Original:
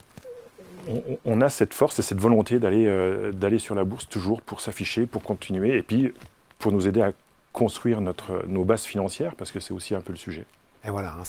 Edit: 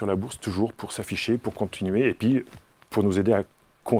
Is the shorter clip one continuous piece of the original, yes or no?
yes